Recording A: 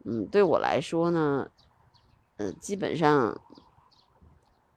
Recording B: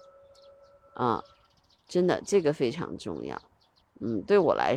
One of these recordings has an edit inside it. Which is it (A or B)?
B